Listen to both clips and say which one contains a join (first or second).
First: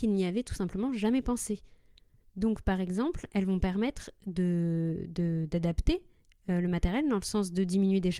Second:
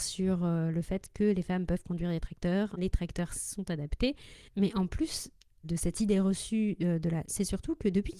second